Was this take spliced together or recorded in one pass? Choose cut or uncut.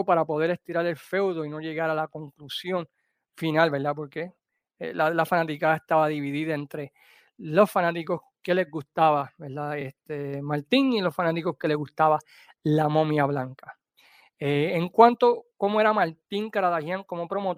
uncut